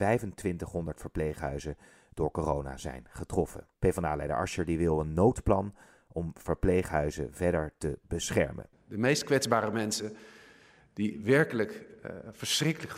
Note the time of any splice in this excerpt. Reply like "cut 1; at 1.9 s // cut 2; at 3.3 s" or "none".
cut 1; at 3.7 s // cut 2; at 8.7 s